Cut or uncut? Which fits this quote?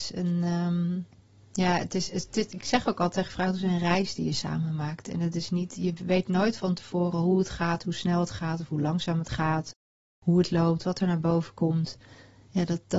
uncut